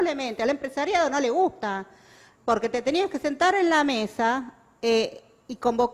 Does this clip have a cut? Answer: no; 0 cuts

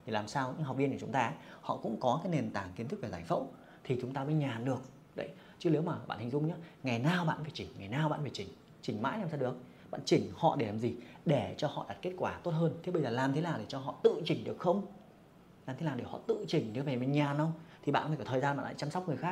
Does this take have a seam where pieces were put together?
no; 0 cuts

